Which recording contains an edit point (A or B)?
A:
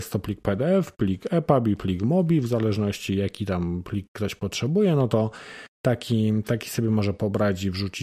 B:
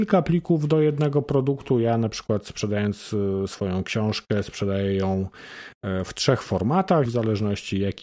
B